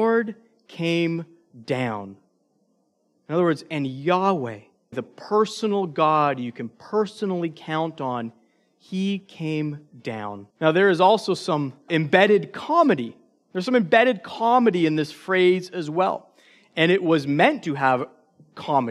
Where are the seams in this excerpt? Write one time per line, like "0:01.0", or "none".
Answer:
0:04.9
0:10.5
0:11.9